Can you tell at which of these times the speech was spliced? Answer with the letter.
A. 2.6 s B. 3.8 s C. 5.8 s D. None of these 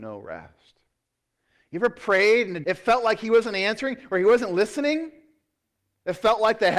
A